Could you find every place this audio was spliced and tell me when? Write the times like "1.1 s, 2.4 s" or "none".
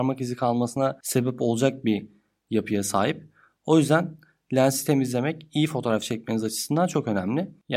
none